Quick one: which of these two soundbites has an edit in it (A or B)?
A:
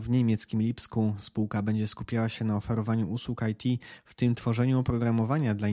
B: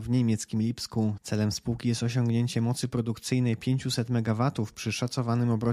B